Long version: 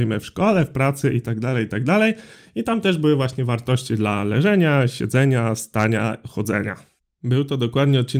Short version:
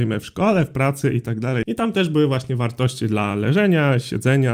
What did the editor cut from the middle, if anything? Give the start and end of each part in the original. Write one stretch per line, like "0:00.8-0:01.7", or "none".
0:01.6-0:02.5